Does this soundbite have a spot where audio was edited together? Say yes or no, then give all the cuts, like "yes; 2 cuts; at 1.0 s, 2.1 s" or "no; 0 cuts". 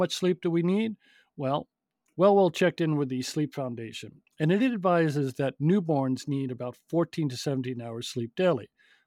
no; 0 cuts